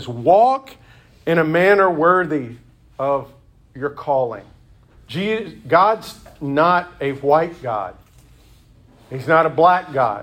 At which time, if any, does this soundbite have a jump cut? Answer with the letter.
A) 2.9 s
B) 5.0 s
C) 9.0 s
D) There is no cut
B